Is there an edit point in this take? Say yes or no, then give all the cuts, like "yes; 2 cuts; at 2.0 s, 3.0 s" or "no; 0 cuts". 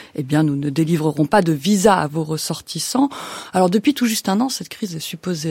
no; 0 cuts